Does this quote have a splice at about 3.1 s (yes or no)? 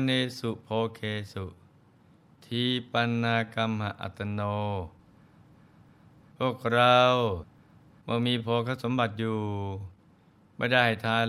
no